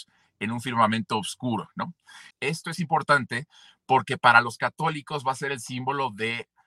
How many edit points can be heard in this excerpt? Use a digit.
1